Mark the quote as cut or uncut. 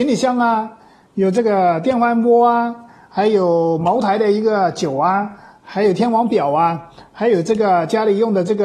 uncut